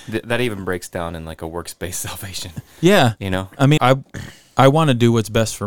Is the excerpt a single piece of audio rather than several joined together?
no; 1 cut; at 3.8 s

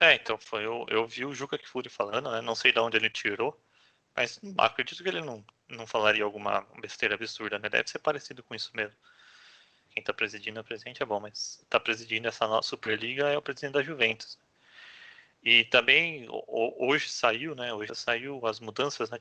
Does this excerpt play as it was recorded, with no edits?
no; 2 cuts; at 9.9 s, 17.9 s

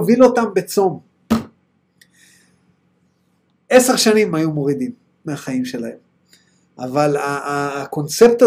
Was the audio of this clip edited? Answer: no; 0 cuts

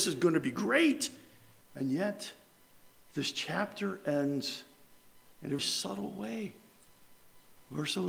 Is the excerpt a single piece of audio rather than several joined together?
no; 2 cuts; at 1.6 s, 5.6 s

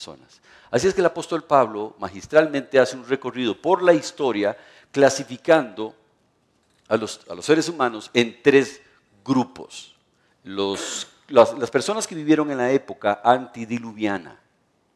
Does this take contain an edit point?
yes; 2 cuts; at 7.2 s, 10.3 s

